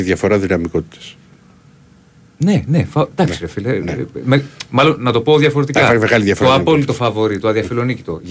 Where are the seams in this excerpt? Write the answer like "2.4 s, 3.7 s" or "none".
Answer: none